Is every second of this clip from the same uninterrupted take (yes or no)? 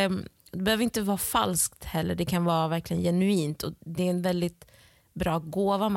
yes